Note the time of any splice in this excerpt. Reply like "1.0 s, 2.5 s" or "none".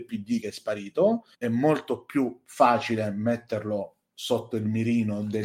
1.3 s

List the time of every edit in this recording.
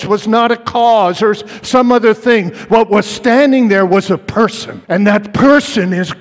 4.8 s

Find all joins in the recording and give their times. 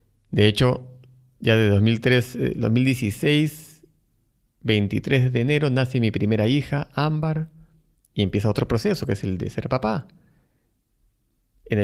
none

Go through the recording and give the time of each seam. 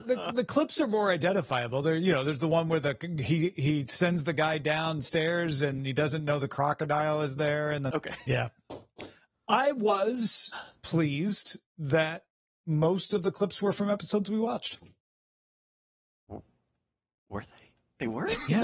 7.9 s

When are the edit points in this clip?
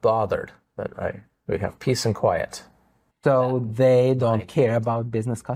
3.1 s

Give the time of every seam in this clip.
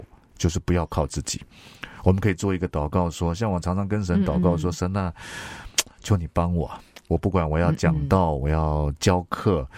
none

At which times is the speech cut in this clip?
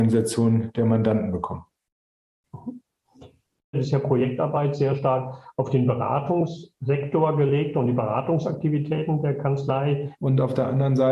3.7 s, 10.1 s

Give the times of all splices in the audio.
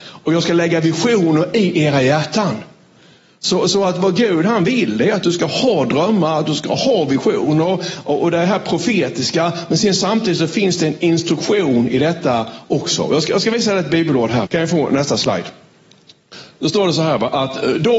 14.5 s

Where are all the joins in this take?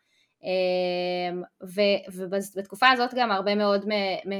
none

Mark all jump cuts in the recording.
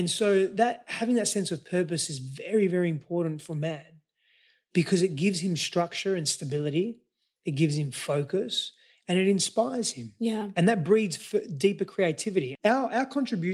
12.6 s

